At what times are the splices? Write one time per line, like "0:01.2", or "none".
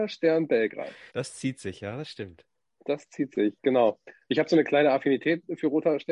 0:01.1